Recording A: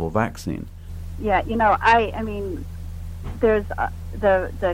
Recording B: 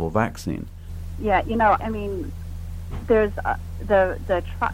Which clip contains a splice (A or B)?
B